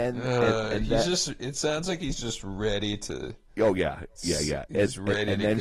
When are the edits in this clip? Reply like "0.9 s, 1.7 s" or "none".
none